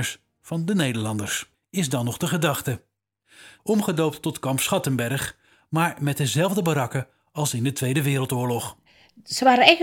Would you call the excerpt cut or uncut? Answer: cut